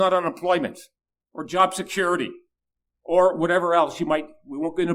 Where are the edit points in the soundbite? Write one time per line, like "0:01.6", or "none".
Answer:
none